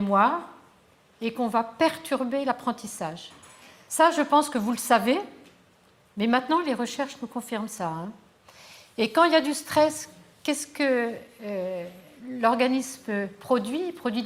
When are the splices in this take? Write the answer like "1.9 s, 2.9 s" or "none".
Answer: none